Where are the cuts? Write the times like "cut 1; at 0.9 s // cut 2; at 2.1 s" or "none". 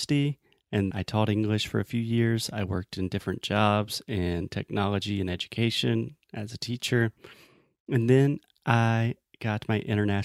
cut 1; at 0.9 s